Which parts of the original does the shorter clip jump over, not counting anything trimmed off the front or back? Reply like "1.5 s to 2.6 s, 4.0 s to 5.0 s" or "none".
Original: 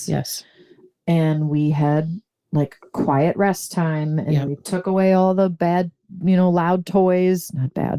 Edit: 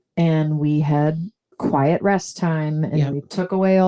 2.4 s to 2.9 s

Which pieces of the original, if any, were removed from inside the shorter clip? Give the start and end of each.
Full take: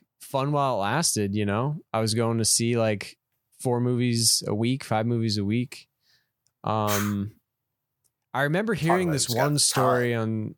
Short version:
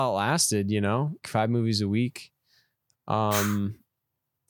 1.9 s to 4.8 s

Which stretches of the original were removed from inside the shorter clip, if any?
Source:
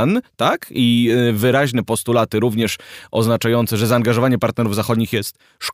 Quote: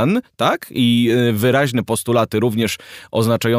none

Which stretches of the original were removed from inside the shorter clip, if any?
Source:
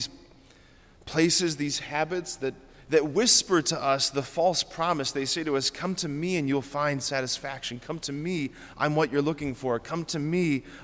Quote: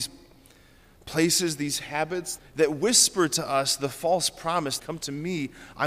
2.4 s to 2.7 s, 5.1 s to 7.8 s

